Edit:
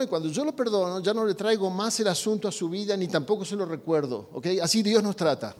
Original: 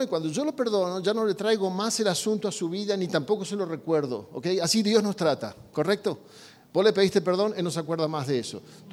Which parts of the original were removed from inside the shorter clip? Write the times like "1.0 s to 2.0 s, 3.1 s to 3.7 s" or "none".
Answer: none